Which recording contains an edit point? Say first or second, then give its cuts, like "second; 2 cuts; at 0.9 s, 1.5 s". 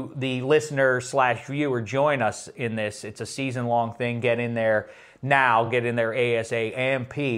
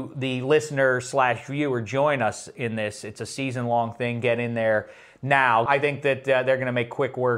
second; 1 cut; at 5.7 s